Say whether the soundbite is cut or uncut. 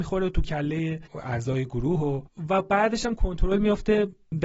uncut